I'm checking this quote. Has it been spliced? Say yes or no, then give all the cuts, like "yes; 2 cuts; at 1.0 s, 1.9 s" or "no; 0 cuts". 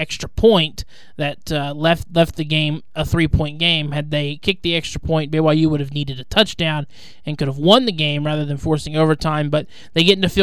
no; 0 cuts